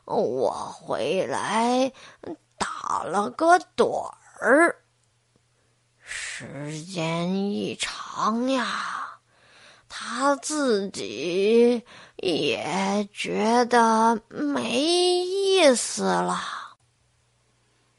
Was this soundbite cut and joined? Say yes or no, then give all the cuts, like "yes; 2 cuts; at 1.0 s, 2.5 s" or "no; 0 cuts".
no; 0 cuts